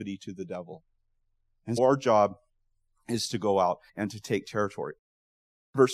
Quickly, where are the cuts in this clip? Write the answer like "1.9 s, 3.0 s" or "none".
1.8 s, 3.9 s

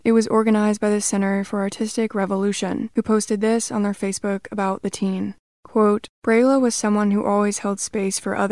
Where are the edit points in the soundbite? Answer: none

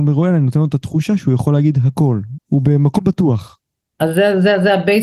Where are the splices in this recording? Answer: 2.4 s, 3.9 s

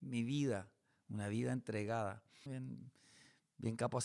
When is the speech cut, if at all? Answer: 2.5 s

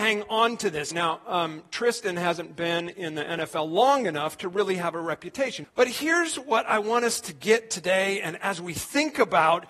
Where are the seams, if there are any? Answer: 0.9 s, 5.6 s

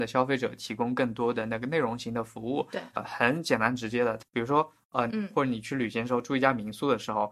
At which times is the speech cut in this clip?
2.9 s, 5.1 s

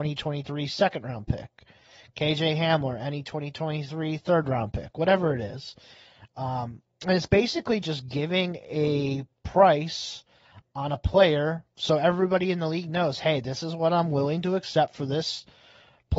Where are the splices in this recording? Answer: none

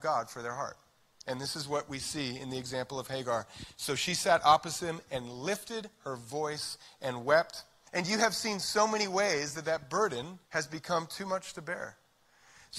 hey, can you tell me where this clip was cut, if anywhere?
7.9 s, 10.5 s

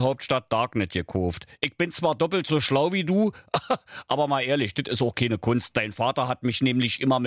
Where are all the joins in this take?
none

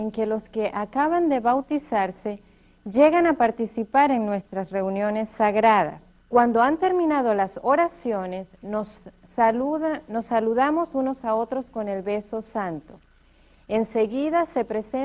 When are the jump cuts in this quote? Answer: 6.2 s

